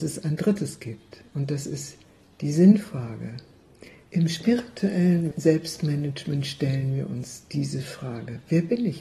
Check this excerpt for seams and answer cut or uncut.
cut